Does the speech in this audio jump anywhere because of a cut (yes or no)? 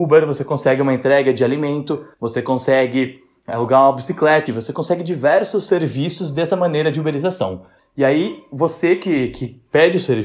yes